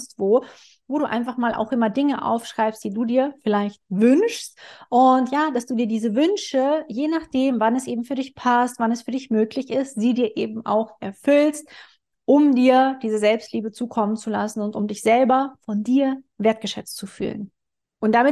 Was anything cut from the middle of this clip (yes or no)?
no